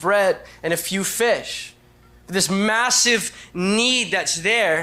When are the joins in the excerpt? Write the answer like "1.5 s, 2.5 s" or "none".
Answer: none